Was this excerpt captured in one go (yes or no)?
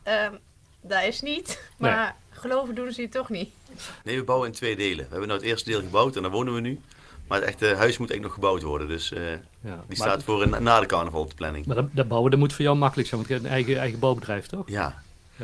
no